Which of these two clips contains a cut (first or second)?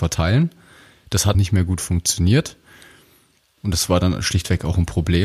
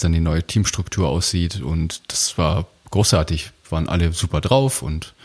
first